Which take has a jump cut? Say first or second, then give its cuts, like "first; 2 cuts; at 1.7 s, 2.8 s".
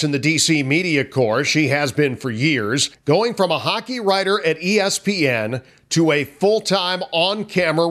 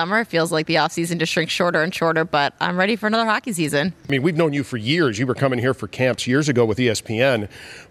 first; 1 cut; at 2.9 s